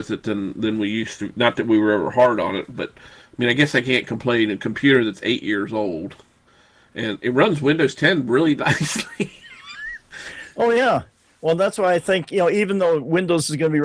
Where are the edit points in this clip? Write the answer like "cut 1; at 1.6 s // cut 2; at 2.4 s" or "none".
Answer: none